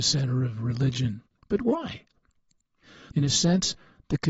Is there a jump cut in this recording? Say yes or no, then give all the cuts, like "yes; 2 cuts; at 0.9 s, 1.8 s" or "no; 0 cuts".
yes; 2 cuts; at 1.4 s, 3.1 s